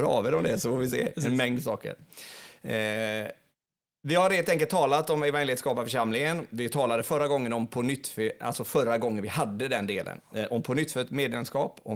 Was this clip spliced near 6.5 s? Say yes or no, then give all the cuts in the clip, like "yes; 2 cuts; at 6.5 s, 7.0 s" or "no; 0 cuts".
no; 0 cuts